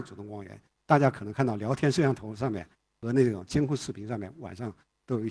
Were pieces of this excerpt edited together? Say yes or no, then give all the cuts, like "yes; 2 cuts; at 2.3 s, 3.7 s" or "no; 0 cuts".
no; 0 cuts